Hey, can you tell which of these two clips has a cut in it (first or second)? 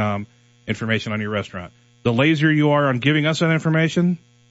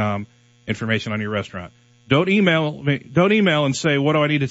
first